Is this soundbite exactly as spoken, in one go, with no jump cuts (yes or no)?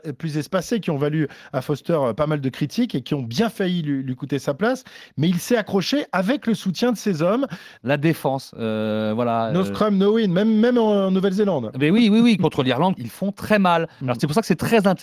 no